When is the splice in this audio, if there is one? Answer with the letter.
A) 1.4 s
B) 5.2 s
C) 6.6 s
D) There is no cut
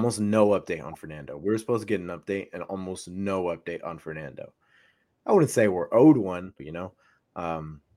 C